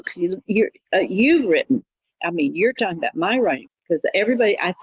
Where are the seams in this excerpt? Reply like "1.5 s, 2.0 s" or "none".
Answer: 3.7 s